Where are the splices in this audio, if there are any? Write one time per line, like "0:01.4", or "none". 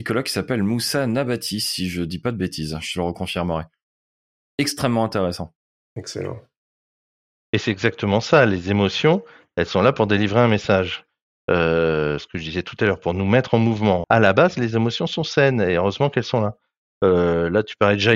0:14.0